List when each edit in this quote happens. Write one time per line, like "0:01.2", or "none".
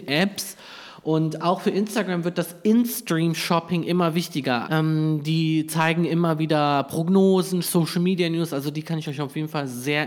0:04.6
0:07.6